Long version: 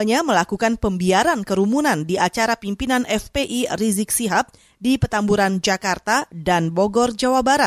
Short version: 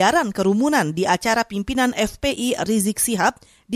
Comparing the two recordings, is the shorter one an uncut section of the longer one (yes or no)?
yes